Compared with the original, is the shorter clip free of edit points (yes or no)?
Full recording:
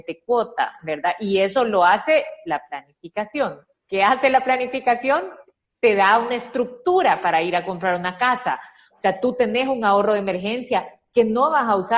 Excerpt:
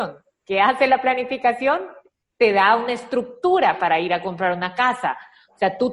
yes